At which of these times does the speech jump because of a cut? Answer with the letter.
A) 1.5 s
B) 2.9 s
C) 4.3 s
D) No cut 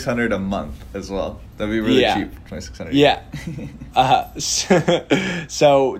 D